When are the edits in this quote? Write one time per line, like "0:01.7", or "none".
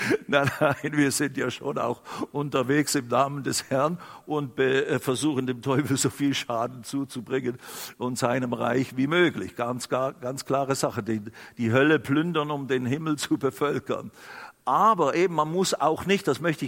none